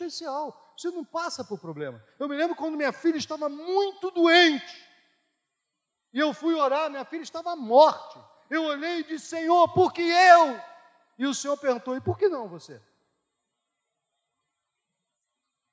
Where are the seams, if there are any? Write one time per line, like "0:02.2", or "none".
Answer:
none